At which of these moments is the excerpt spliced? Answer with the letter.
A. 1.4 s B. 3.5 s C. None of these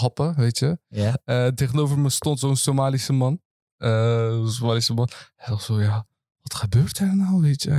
C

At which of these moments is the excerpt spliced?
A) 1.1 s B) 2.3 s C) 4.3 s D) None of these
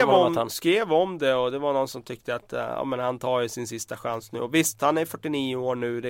D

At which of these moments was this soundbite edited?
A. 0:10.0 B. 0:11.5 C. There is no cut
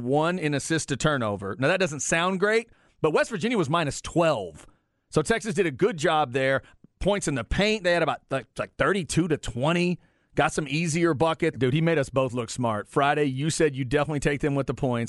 B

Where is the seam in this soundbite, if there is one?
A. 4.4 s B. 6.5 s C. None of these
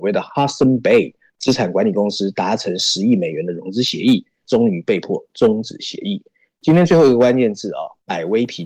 A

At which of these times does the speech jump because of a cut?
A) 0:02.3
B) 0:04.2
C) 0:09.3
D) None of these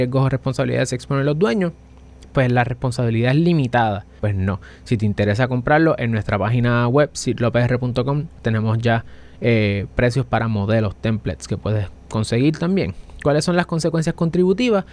B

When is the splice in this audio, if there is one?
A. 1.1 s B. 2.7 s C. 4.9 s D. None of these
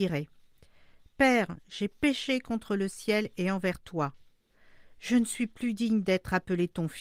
D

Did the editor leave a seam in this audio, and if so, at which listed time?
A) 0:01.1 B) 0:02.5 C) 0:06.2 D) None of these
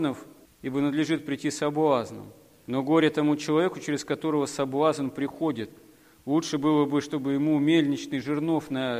D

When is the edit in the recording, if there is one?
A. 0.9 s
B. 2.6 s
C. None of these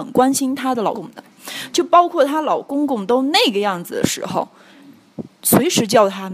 A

